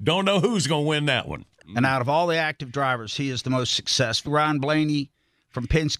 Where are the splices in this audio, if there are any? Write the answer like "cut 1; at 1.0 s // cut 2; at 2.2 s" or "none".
cut 1; at 1.6 s // cut 2; at 4.3 s